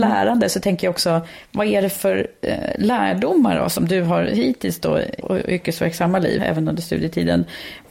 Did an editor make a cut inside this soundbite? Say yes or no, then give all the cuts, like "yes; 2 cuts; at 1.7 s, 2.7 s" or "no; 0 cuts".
yes; 2 cuts; at 5.2 s, 6.4 s